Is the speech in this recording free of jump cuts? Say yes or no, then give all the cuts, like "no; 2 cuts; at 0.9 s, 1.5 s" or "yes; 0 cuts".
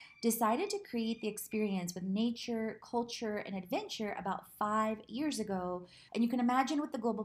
no; 1 cut; at 6.1 s